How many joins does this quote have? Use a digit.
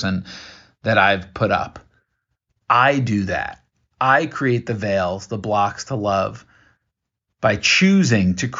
0